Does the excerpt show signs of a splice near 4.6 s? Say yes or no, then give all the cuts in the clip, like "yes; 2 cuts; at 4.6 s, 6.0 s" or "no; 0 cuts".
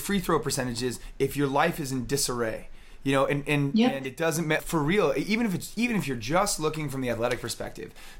yes; 1 cut; at 4.6 s